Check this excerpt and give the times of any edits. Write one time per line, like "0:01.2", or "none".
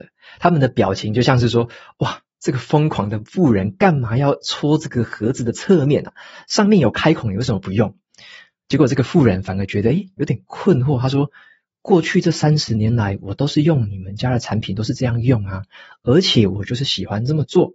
none